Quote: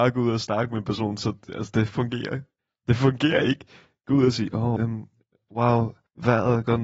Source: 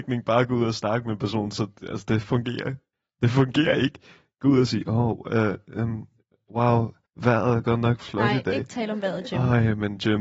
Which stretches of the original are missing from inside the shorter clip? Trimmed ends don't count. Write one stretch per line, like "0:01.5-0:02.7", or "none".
0:05.1-0:05.8